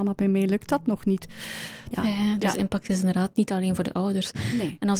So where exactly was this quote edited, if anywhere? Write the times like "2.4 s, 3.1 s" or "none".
1.9 s